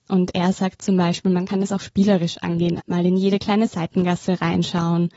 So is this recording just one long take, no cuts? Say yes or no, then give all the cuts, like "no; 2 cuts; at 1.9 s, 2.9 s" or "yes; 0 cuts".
no; 1 cut; at 2.8 s